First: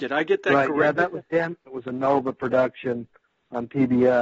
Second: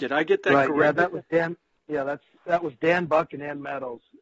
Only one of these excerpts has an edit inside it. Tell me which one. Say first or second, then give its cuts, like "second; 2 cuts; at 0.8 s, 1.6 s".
first; 1 cut; at 1.7 s